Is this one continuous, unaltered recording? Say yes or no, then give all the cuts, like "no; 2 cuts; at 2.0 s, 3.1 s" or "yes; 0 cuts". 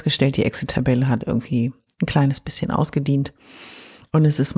yes; 0 cuts